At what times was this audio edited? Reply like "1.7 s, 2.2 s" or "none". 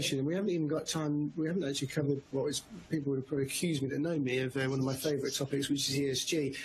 none